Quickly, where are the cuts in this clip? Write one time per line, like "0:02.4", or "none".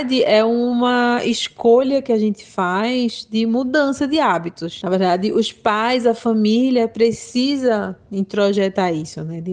none